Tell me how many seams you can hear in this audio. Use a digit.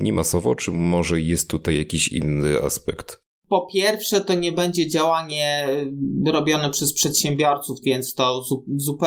1